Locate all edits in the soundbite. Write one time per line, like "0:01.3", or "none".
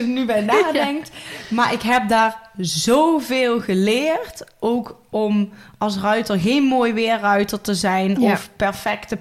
none